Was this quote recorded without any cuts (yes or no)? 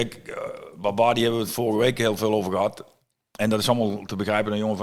yes